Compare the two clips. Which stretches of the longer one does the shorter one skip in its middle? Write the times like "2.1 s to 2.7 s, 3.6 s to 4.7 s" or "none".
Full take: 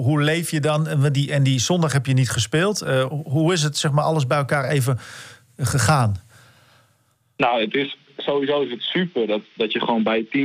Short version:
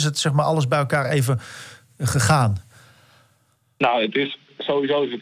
none